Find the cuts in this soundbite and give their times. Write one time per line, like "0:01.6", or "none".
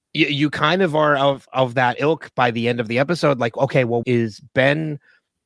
0:04.0